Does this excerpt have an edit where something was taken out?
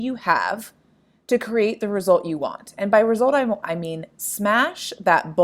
yes; 1 cut; at 3.6 s

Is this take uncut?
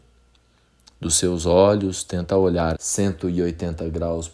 no; 1 cut; at 2.7 s

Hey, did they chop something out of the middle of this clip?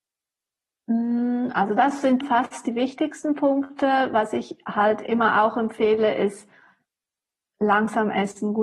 yes; 1 cut; at 2.2 s

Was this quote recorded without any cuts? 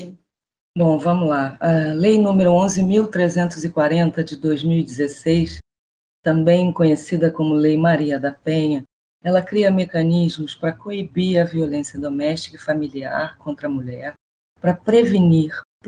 yes; 0 cuts

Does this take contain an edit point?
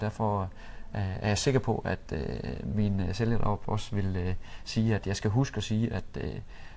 no; 0 cuts

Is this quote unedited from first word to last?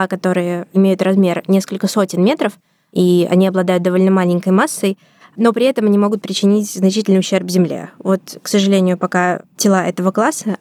yes; 0 cuts

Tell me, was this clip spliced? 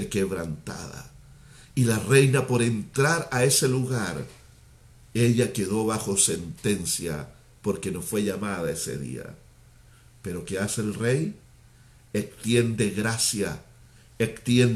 no; 0 cuts

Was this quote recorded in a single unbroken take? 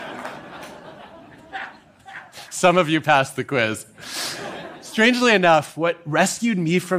yes; 0 cuts

